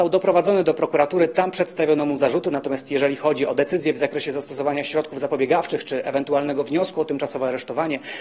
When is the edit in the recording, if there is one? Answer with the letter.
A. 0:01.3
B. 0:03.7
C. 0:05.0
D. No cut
D